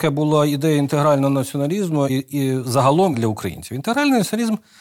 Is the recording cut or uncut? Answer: cut